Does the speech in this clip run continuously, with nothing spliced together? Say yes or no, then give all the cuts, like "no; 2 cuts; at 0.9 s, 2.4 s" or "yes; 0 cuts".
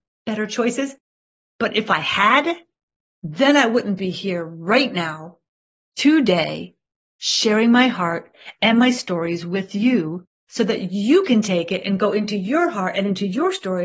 yes; 0 cuts